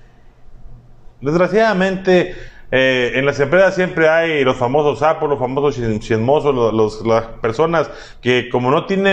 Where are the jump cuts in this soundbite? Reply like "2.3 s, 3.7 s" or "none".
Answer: 1.2 s